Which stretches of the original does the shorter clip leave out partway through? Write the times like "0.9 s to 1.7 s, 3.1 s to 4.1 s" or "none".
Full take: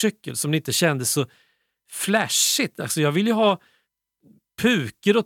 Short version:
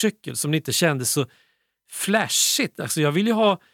none